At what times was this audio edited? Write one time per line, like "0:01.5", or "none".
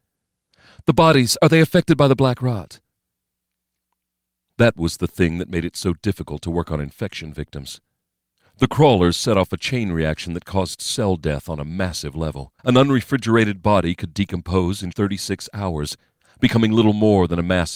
0:12.6
0:14.9